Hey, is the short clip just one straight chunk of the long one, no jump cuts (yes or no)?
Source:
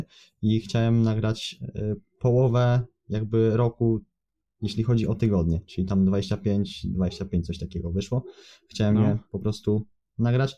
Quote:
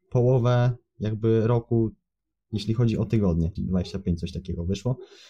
no